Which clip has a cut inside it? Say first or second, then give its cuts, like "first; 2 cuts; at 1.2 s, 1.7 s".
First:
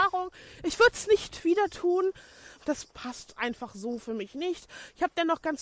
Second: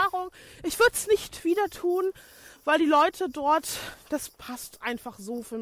first; 1 cut; at 2.6 s